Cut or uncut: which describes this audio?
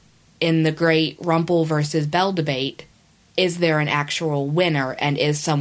uncut